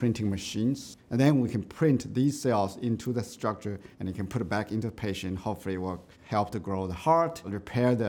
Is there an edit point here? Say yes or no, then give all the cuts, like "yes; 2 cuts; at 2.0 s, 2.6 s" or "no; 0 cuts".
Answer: yes; 3 cuts; at 1.0 s, 3.9 s, 6.1 s